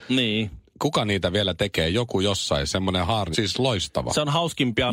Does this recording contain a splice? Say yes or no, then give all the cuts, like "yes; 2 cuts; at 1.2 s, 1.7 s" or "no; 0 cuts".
yes; 1 cut; at 3.3 s